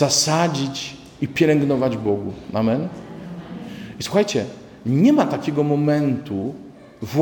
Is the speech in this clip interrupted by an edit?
no; 0 cuts

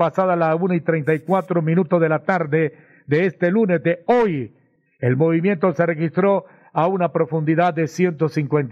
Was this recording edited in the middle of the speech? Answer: no; 0 cuts

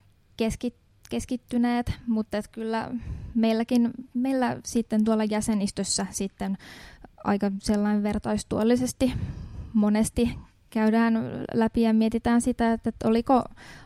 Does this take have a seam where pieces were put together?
no; 0 cuts

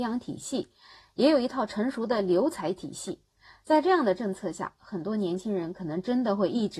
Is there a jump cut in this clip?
no; 0 cuts

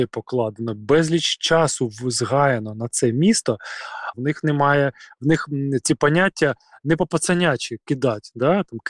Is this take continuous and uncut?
no; 1 cut; at 4.1 s

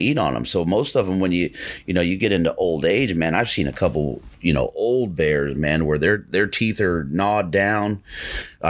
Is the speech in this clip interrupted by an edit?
no; 0 cuts

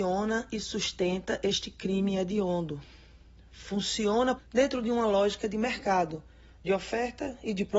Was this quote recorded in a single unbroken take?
no; 1 cut; at 4.4 s

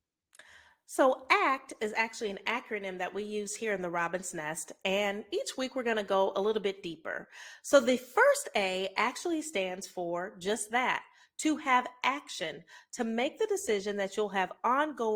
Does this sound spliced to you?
no; 0 cuts

